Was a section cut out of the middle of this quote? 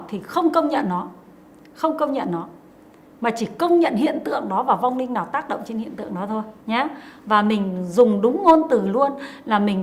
yes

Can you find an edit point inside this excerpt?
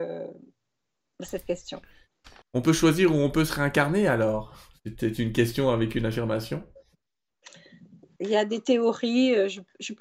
yes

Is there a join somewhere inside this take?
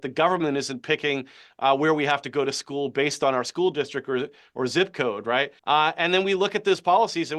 yes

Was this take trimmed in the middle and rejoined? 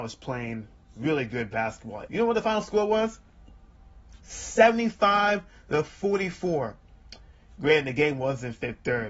yes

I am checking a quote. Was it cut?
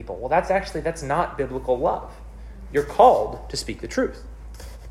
no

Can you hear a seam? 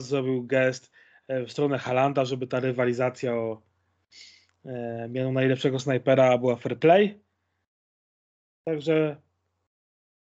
no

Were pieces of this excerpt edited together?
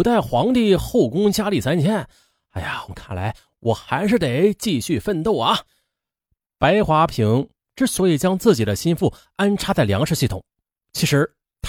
yes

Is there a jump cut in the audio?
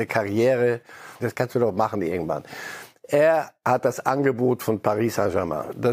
yes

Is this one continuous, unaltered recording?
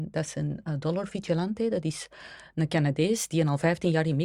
yes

